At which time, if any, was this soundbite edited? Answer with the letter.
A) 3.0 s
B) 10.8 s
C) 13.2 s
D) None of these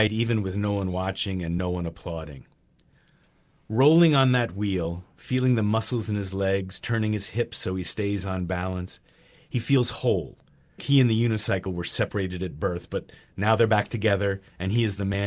B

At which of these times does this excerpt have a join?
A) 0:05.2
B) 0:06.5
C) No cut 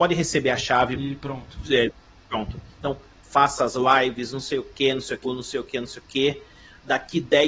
A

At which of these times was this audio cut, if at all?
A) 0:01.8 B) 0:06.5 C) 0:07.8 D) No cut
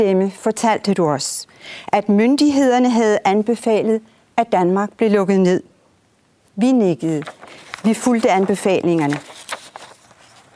B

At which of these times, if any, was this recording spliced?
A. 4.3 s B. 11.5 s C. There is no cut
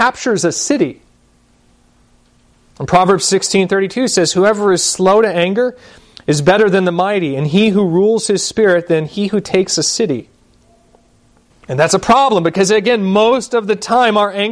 B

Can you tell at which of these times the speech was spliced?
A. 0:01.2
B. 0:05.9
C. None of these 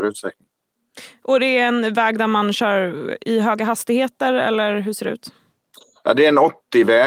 C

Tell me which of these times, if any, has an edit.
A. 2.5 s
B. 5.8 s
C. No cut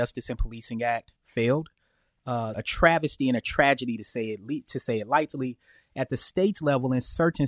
A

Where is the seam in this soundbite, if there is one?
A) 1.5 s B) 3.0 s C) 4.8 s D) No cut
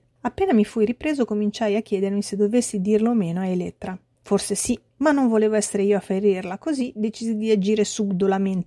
D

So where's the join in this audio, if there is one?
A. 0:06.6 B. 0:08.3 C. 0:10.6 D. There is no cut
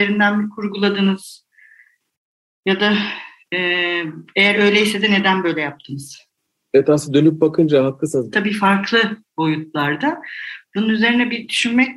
B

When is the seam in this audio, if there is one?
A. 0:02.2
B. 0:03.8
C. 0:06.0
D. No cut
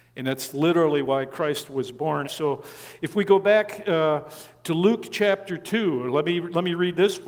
A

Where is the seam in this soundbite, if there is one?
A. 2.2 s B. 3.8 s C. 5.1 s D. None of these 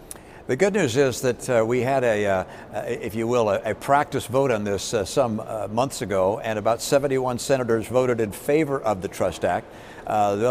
D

